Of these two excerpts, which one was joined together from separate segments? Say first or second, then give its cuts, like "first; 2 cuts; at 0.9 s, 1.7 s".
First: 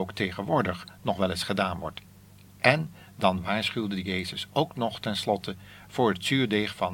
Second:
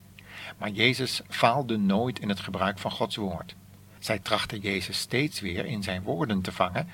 second; 1 cut; at 4.0 s